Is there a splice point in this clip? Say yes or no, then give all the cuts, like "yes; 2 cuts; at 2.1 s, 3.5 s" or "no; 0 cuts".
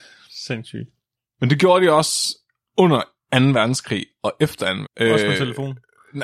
yes; 1 cut; at 4.8 s